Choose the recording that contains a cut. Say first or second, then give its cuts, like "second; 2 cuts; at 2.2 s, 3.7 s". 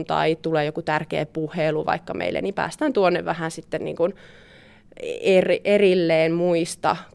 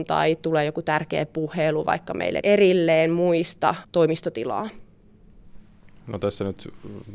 second; 2 cuts; at 2.4 s, 3.8 s